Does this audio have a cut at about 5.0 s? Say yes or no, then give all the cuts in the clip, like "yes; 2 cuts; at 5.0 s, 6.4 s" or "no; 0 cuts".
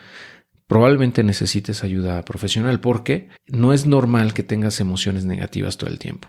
no; 1 cut; at 3.4 s